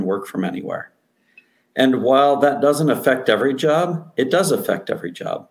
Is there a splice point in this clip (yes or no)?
no